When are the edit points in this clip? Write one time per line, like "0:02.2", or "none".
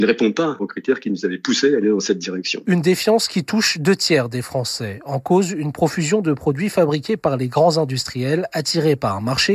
none

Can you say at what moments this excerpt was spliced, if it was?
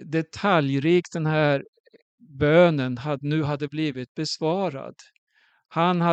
none

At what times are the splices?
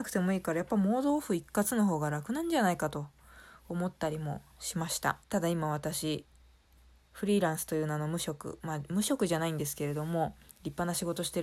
0:05.2

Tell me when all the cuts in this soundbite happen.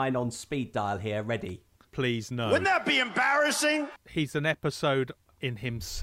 0:01.9
0:04.0

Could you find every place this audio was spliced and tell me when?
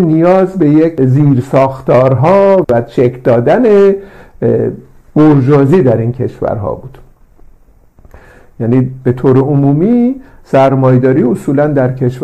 0:02.6

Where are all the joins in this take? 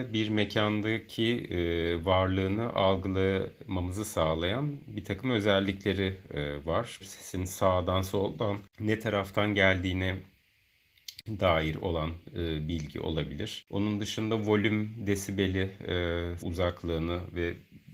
0:07.0
0:16.4

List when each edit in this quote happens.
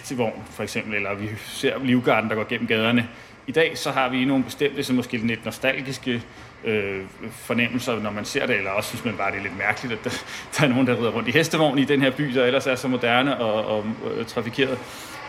0:13.4

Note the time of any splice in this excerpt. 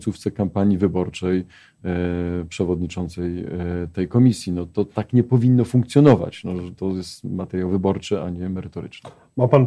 none

